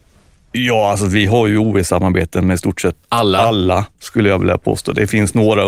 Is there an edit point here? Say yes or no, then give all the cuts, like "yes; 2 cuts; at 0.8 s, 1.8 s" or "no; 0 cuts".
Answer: no; 0 cuts